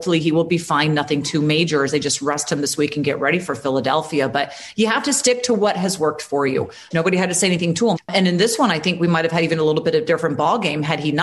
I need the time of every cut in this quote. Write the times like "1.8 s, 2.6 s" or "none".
6.9 s, 8.0 s